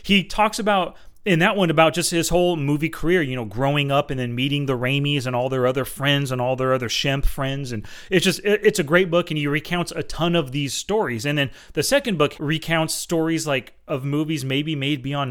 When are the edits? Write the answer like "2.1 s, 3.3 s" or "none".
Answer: 12.3 s